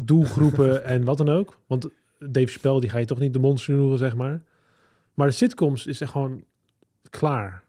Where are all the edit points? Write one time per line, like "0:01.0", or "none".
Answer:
none